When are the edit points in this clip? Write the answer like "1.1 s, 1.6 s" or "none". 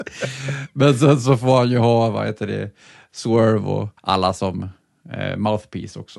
4.0 s